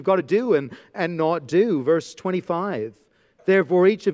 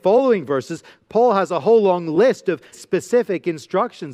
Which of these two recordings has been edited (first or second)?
second